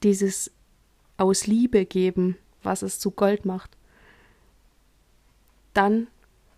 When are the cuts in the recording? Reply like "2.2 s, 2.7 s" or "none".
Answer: 2.6 s